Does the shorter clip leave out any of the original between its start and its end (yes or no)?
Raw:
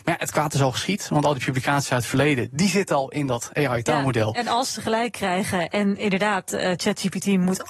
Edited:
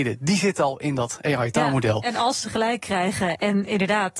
no